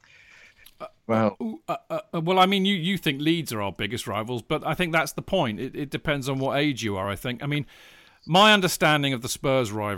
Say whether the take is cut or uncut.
uncut